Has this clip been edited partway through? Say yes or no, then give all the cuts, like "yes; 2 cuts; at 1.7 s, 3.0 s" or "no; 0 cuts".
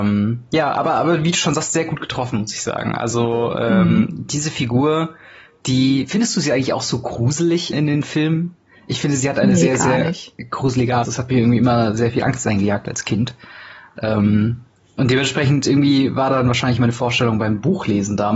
yes; 2 cuts; at 7.7 s, 11.0 s